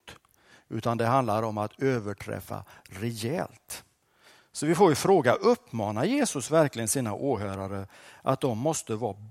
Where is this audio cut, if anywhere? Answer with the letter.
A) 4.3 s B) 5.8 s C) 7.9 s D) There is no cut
D